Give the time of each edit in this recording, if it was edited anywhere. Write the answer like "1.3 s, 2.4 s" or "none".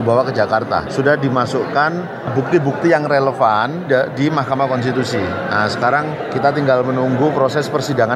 3.9 s